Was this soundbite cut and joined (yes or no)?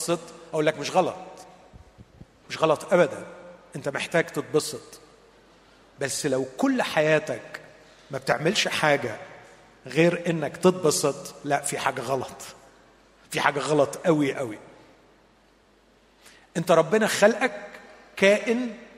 yes